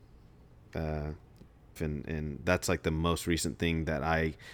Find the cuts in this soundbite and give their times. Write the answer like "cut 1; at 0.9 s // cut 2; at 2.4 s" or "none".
cut 1; at 1.8 s